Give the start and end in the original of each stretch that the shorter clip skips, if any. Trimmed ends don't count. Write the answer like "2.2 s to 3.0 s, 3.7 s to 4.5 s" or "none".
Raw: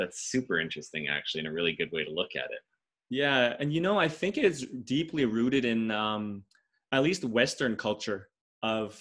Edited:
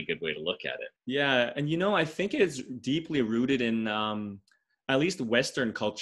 2.7 s to 3.0 s